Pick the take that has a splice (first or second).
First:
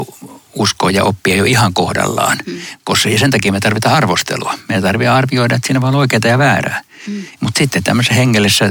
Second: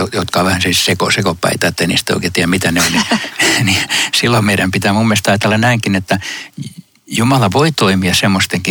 first